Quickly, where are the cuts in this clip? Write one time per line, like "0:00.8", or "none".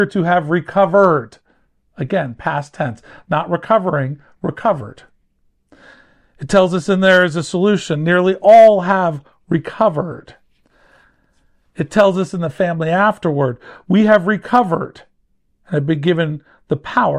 none